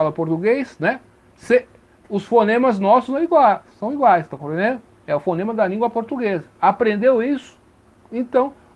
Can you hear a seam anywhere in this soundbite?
no; 0 cuts

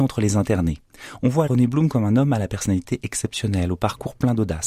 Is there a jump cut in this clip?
yes; 1 cut; at 1.5 s

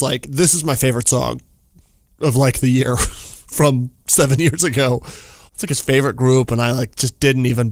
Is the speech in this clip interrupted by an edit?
yes; 1 cut; at 5.5 s

